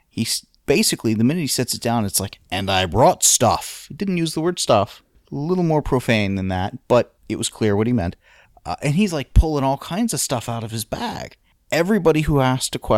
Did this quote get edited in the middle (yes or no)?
no